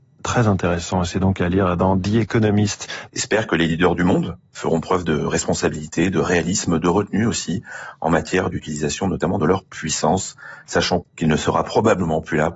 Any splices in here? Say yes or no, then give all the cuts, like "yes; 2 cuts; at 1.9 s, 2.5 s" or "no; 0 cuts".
yes; 2 cuts; at 3.1 s, 11.0 s